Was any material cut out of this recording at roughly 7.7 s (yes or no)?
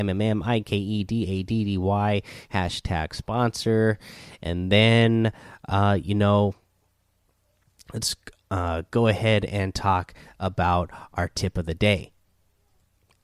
no